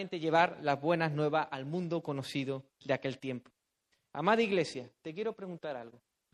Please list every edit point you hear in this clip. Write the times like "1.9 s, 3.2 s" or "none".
none